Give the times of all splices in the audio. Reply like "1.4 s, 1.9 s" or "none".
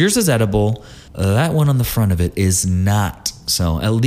1.1 s